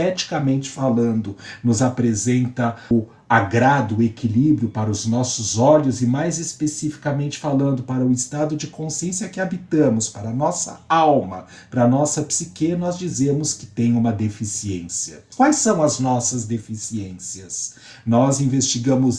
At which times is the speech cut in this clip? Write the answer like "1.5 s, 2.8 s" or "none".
2.9 s, 15.3 s